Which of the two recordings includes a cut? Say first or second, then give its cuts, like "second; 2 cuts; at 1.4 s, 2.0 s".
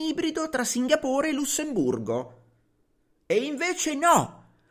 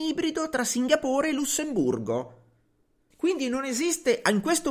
second; 1 cut; at 3.1 s